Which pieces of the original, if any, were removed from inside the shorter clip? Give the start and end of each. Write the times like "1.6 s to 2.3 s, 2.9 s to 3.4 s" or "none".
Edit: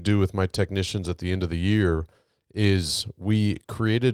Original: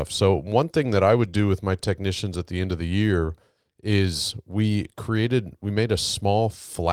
none